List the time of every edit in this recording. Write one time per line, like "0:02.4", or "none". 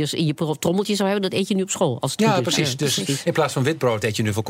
none

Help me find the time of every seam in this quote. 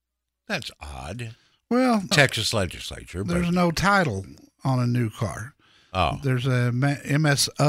0:02.1

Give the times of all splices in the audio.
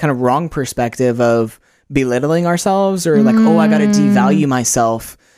none

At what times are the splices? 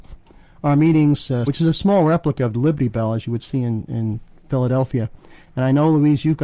0:01.5

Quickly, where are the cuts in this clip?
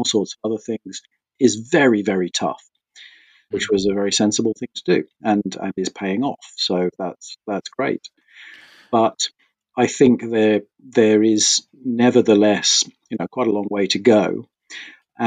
0:03.5

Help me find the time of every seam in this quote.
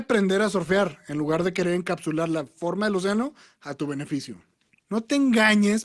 0:04.8

